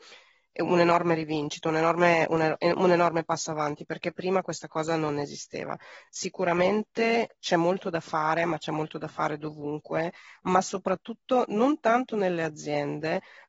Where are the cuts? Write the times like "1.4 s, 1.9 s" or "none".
none